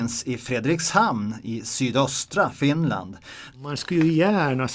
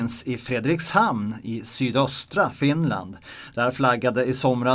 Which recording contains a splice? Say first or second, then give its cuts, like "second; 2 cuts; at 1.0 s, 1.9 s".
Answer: first; 1 cut; at 3.5 s